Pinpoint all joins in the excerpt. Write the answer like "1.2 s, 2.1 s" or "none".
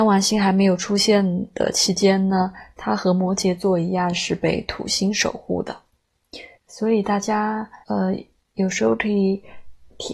6.5 s, 7.8 s

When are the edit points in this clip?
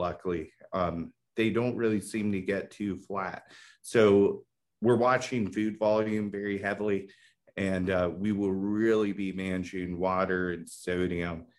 none

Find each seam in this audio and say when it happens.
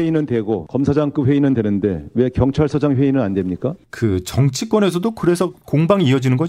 3.9 s

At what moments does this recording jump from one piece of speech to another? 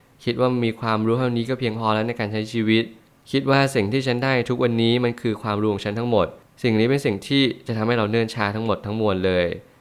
none

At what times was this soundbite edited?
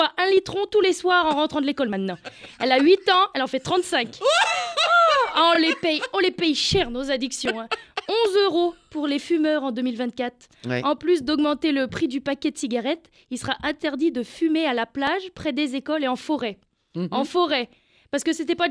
none

